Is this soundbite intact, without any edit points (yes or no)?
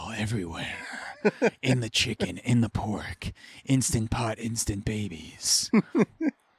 yes